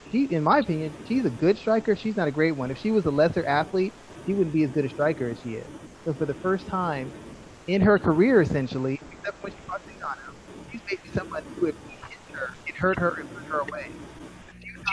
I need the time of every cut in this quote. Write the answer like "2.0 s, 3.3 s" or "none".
5.9 s, 12.6 s